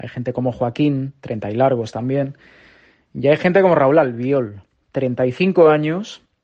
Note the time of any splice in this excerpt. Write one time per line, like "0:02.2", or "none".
none